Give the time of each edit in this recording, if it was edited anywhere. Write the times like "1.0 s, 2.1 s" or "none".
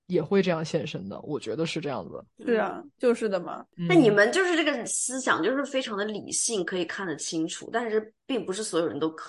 none